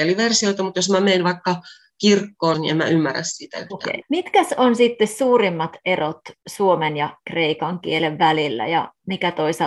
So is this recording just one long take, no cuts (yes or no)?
no